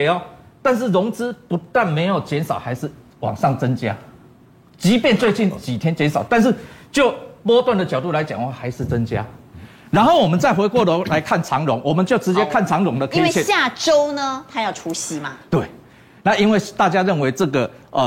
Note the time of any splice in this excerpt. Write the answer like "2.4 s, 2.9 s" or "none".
none